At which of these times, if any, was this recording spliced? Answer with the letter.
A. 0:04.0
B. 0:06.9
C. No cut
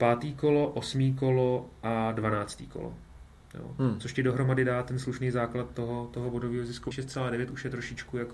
B